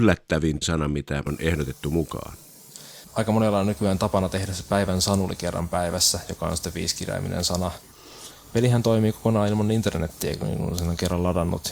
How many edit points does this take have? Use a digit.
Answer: 1